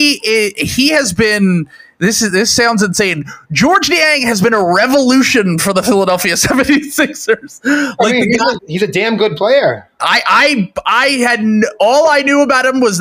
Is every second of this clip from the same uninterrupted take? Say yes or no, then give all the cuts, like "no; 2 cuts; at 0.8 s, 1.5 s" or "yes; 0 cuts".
no; 2 cuts; at 8.6 s, 10.0 s